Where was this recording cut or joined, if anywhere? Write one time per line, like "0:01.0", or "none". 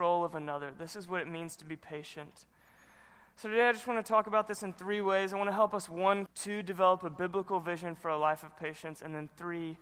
0:06.3